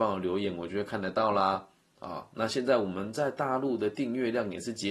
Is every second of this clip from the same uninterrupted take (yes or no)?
yes